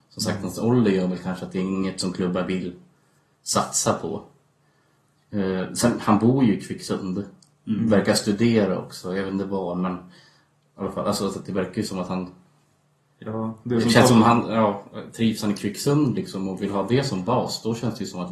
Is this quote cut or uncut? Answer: uncut